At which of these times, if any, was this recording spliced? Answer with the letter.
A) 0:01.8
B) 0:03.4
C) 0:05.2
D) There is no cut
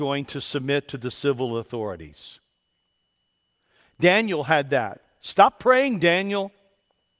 D